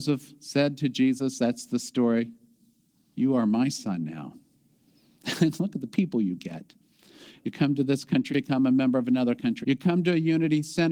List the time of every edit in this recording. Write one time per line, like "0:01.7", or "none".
0:08.3
0:09.6